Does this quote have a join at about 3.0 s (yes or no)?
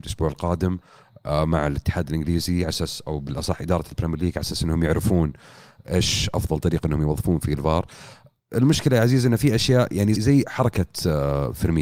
yes